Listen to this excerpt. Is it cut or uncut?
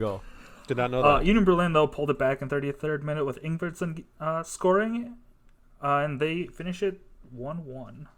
uncut